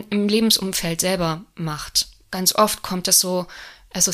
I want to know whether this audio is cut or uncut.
uncut